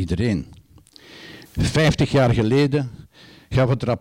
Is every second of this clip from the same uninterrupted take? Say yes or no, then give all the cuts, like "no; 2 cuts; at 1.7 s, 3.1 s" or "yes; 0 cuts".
no; 1 cut; at 1.5 s